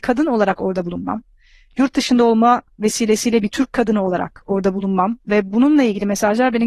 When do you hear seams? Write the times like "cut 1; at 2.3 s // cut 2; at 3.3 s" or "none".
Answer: none